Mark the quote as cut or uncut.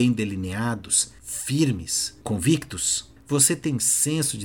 uncut